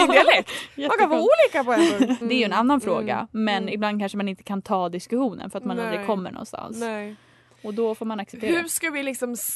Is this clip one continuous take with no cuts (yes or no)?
no